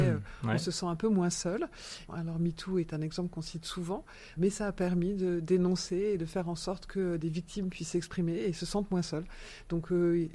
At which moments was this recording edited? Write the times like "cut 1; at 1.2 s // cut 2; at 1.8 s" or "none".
cut 1; at 2.1 s // cut 2; at 4.4 s

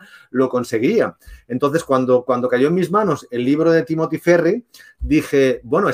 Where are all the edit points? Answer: none

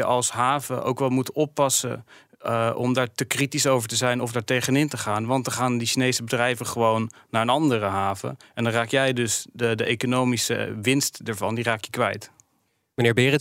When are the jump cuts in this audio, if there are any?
none

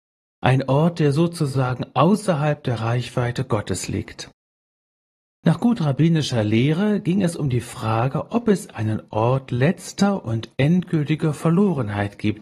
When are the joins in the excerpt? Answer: cut 1; at 5.3 s

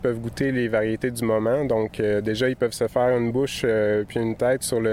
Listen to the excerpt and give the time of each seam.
none

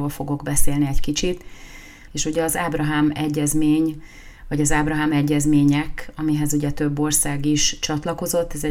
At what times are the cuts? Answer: cut 1; at 2.1 s

